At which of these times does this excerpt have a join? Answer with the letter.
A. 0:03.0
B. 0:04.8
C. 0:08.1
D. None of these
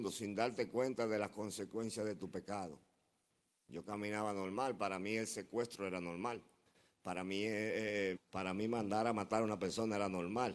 C